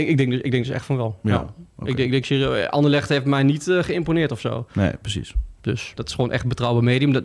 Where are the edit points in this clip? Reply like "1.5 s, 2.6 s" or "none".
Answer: 6.0 s